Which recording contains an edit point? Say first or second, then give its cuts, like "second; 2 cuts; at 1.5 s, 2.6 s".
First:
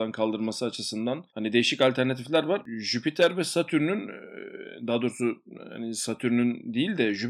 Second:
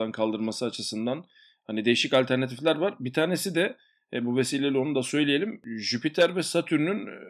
first; 2 cuts; at 1.3 s, 2.6 s